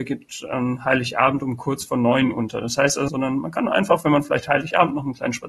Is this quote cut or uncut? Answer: cut